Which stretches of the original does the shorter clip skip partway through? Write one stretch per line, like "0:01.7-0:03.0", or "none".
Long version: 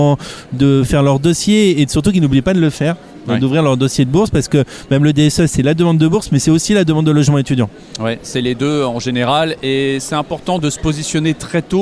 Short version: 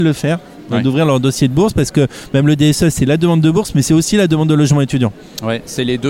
none